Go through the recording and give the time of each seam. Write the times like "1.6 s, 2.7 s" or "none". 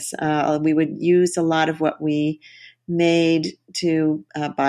none